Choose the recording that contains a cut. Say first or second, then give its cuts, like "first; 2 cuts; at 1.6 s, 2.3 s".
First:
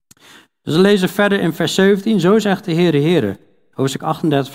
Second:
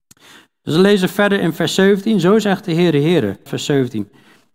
second; 1 cut; at 3.5 s